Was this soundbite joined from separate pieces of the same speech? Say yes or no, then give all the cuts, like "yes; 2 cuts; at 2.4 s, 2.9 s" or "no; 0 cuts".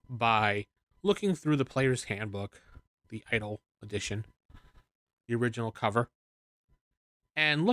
no; 0 cuts